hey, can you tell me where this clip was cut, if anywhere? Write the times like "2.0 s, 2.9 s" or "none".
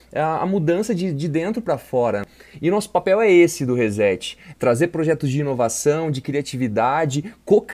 4.5 s